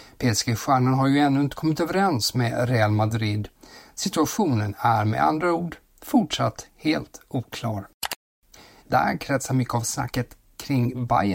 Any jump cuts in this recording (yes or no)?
yes